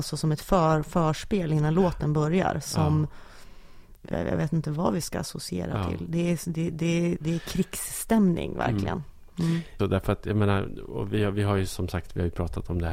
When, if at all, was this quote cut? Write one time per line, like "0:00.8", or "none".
0:09.8

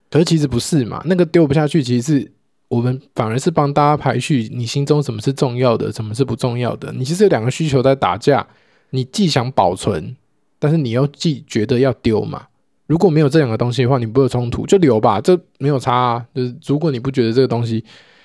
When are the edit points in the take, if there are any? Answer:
none

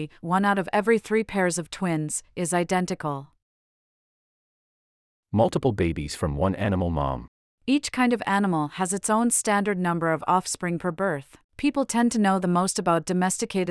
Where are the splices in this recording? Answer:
0:11.4

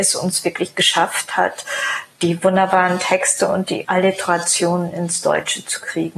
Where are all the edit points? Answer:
0:02.1

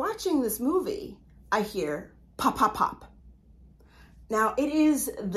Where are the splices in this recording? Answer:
none

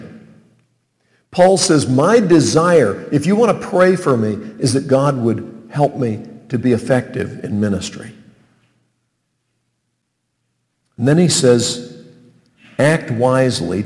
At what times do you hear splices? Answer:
none

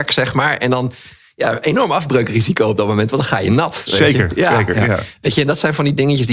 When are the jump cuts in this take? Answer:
none

